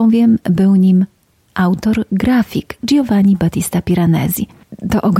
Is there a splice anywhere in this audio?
no; 0 cuts

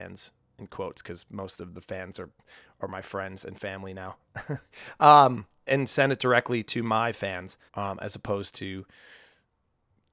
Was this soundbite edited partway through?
yes; 2 cuts; at 5.7 s, 7.7 s

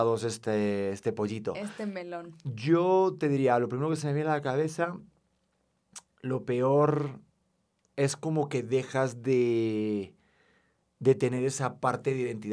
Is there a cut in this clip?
no; 0 cuts

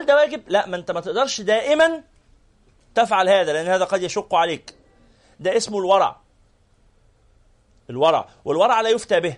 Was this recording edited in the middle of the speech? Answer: no; 0 cuts

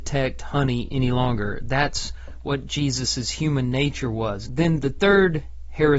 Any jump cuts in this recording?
yes; 1 cut; at 4.4 s

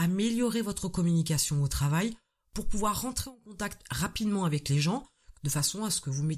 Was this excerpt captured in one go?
no; 1 cut; at 5.3 s

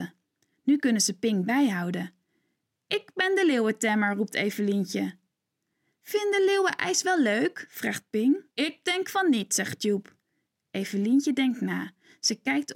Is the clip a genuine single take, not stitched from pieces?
no; 1 cut; at 8.5 s

